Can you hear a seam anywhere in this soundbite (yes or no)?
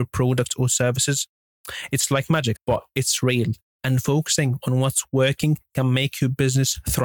yes